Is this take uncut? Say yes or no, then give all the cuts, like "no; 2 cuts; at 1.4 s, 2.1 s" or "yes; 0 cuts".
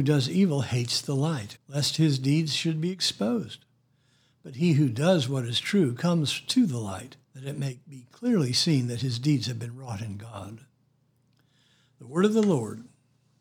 no; 2 cuts; at 1.6 s, 7.2 s